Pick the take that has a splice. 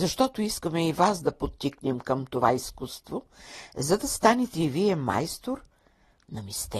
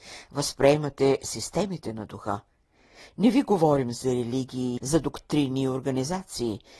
second; 1 cut; at 4.8 s

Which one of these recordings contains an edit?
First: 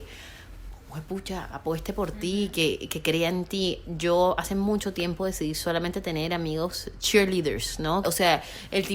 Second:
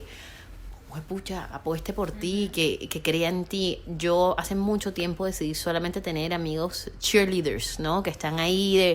first; 1 cut; at 8.0 s

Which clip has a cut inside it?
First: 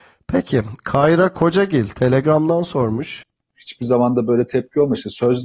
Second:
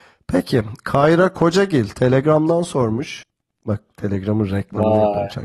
first; 1 cut; at 3.5 s

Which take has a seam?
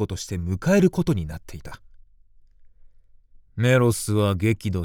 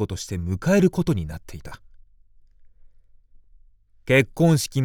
first; 1 cut; at 3.4 s

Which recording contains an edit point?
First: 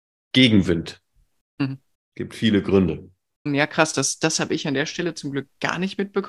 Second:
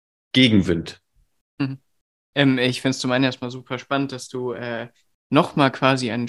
first; 2 cuts; at 1.9 s, 3.5 s

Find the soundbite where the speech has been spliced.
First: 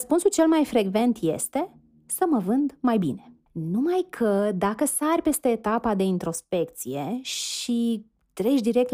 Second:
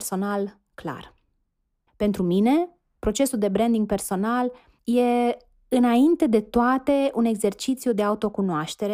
first; 1 cut; at 3.4 s

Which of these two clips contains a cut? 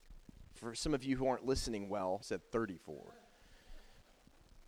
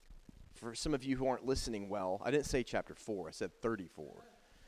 first; 1 cut; at 2.2 s

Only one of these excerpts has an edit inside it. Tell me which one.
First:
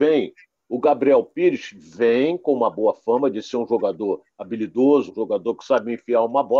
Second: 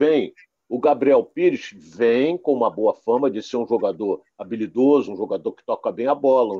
first; 1 cut; at 5.1 s

